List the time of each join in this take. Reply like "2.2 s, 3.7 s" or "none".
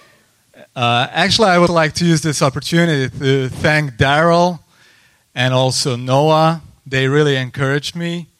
1.7 s